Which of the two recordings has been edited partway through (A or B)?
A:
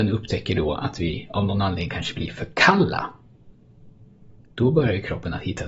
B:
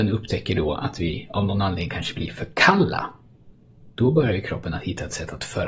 B